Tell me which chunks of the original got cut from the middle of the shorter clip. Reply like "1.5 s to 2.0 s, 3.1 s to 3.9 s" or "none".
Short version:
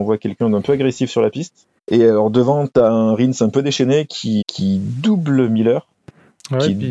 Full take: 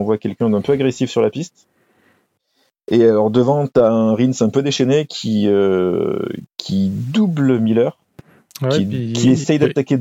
1.8 s to 2.8 s, 5.4 s to 6.5 s

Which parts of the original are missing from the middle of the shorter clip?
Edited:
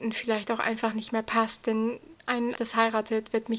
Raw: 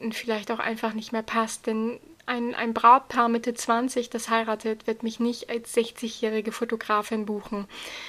2.6 s to 4.1 s

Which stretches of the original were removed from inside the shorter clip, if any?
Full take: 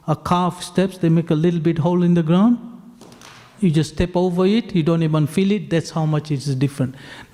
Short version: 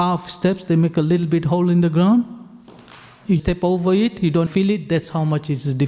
3.7 s to 3.9 s, 5.0 s to 5.3 s

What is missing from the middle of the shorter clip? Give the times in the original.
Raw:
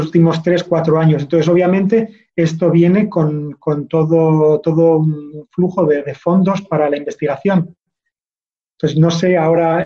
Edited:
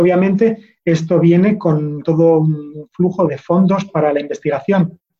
3.5 s to 4.6 s, 5.8 s to 6.0 s

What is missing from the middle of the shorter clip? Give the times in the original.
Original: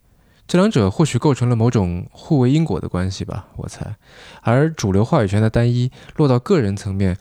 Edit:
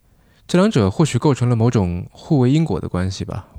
none

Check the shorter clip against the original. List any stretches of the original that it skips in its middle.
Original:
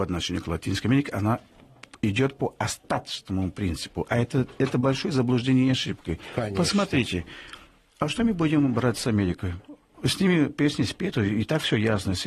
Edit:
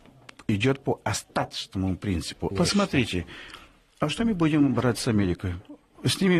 4.1 s to 6.5 s

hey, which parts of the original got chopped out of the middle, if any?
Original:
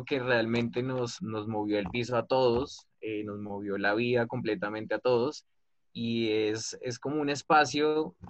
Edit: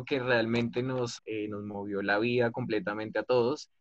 1.2 s to 2.9 s

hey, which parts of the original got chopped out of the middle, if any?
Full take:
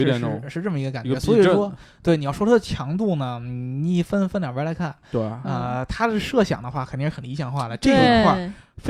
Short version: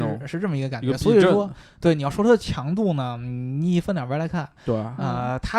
4.1 s to 4.3 s

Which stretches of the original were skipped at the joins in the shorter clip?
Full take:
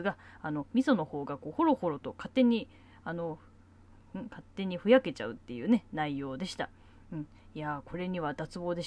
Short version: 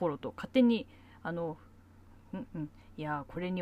4.2 s to 7.0 s

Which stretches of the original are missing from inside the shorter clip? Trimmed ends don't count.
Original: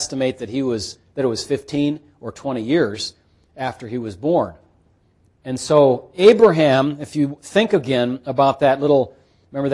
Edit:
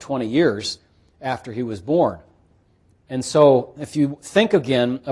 6.1 s to 7.0 s

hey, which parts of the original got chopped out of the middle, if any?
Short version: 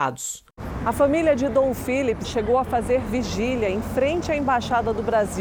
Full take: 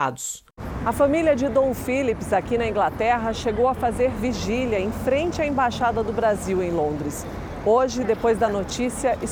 2.2 s to 3.3 s

